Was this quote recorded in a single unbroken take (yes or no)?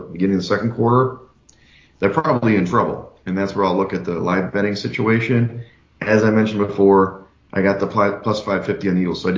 yes